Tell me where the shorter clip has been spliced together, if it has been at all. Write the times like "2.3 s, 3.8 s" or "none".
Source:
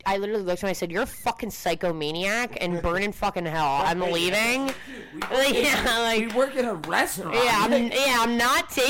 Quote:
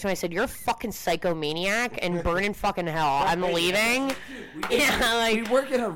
4.7 s